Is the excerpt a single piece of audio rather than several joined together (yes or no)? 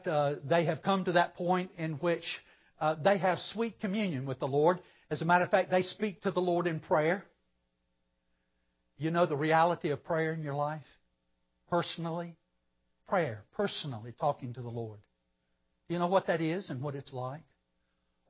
yes